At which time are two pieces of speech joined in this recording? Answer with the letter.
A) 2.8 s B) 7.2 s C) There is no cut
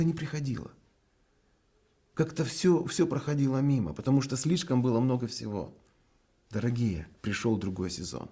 B